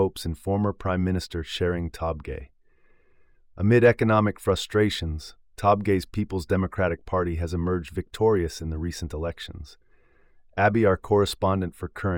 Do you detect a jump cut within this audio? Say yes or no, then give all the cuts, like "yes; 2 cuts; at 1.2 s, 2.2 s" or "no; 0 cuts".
no; 0 cuts